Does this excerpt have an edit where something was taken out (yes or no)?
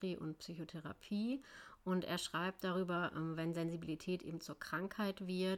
no